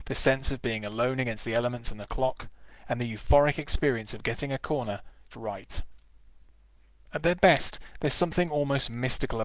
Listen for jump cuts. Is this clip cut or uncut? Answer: cut